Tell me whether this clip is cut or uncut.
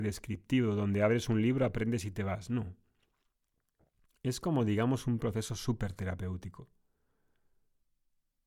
uncut